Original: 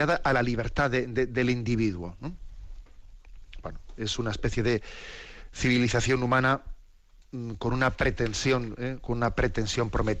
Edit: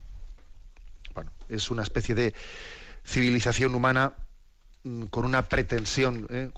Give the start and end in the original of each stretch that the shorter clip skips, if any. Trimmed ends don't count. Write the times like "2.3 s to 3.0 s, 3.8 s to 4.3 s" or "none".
none